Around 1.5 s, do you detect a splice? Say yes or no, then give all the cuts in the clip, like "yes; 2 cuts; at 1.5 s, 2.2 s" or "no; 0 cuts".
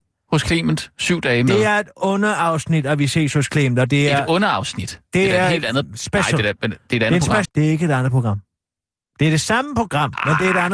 no; 1 cut; at 7.4 s